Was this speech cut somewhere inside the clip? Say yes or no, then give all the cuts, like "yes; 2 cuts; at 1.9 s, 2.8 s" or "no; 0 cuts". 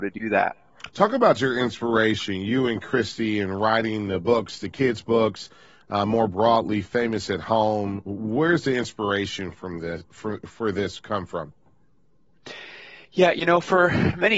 no; 0 cuts